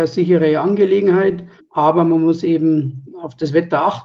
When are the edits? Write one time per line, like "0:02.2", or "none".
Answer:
none